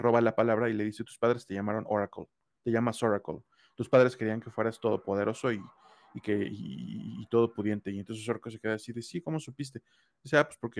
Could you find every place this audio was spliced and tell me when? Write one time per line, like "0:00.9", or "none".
none